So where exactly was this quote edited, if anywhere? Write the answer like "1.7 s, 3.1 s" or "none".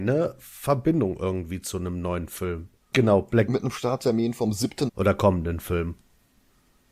2.9 s, 4.9 s